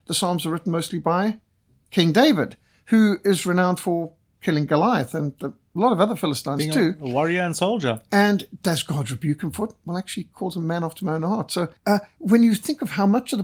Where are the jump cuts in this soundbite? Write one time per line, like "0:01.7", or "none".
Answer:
0:11.8